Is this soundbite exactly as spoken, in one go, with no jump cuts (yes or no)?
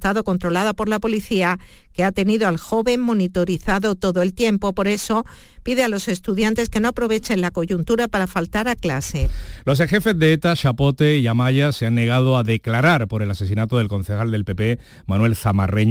yes